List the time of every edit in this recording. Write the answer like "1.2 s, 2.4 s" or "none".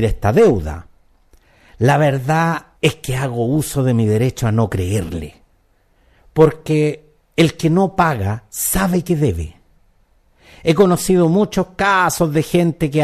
2.8 s